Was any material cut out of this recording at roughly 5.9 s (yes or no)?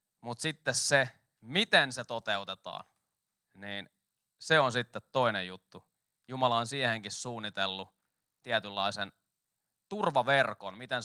no